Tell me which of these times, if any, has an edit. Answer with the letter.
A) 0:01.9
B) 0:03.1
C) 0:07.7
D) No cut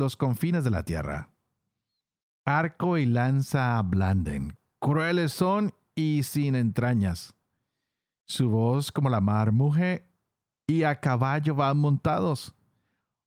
D